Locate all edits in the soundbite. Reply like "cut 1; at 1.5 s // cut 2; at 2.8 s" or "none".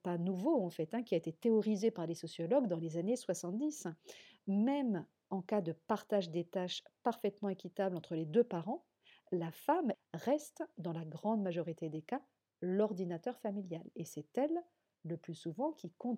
cut 1; at 4.4 s // cut 2; at 9.9 s